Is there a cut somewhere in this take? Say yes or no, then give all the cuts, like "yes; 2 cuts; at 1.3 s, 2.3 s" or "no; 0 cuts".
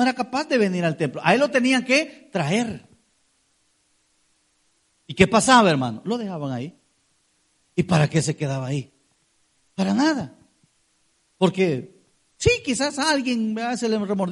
no; 0 cuts